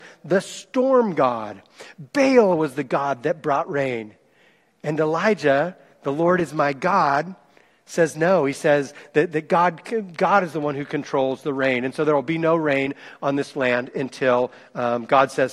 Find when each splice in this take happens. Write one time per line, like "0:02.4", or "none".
none